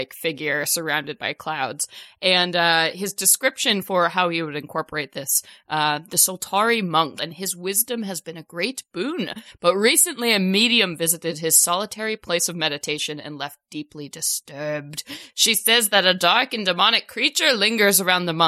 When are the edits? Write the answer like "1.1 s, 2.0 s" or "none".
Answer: 7.2 s